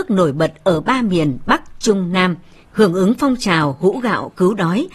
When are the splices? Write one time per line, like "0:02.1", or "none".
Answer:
0:02.6

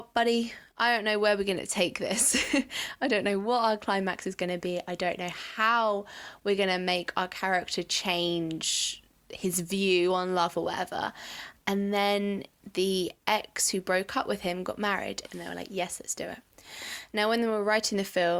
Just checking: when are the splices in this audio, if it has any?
0:15.2

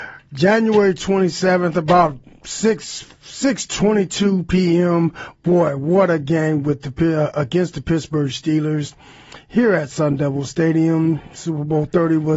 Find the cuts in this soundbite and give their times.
none

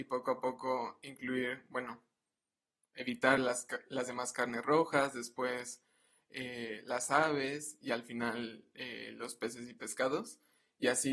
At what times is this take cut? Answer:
none

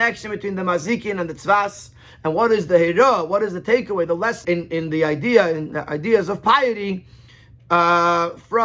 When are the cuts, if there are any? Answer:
0:04.4

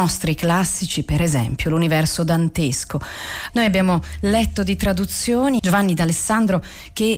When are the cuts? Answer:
0:03.5
0:05.6

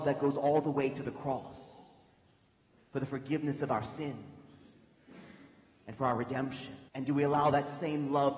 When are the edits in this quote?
0:06.9

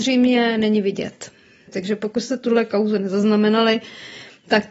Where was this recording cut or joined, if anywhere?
none

